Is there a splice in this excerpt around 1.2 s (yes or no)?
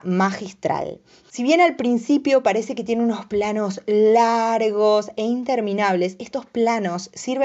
yes